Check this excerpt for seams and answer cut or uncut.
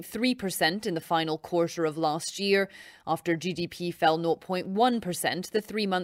uncut